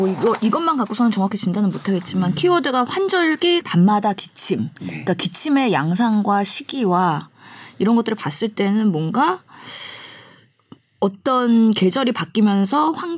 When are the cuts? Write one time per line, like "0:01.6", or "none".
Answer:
0:03.6